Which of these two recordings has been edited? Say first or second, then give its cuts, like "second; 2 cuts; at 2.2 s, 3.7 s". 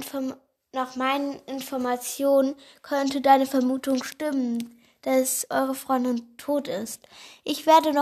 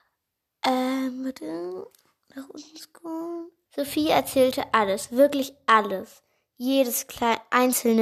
second; 1 cut; at 3.7 s